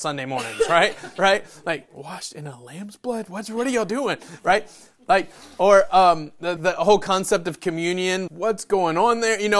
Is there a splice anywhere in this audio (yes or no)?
yes